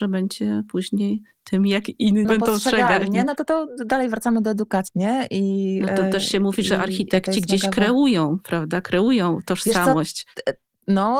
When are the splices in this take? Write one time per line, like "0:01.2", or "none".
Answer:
0:02.2
0:04.9